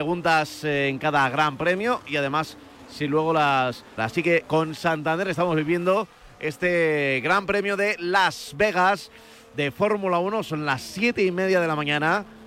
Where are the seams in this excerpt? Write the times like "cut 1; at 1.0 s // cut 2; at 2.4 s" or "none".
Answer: cut 1; at 4.0 s